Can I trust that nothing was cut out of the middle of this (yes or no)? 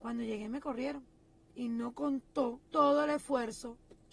yes